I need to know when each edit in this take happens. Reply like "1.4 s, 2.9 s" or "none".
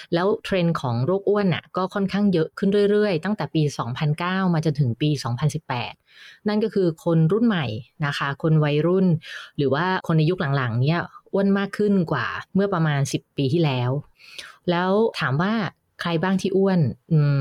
12.5 s